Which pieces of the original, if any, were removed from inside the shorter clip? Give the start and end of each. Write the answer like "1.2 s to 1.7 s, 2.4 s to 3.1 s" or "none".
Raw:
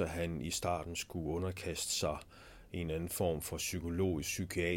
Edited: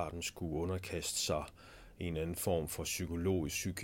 none